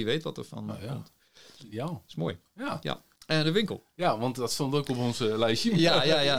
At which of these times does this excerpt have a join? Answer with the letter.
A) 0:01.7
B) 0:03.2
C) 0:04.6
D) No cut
B